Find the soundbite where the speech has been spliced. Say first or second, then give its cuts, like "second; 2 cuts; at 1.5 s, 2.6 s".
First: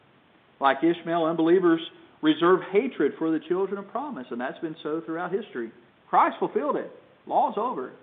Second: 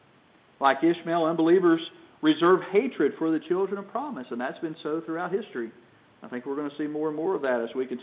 first; 1 cut; at 5.9 s